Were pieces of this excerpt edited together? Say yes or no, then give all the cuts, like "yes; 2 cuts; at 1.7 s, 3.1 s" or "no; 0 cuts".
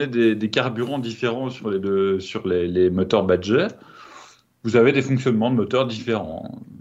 no; 0 cuts